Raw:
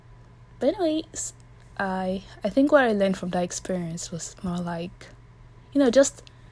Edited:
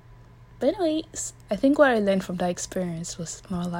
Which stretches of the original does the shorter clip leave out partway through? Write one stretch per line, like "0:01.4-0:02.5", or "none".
0:01.5-0:02.4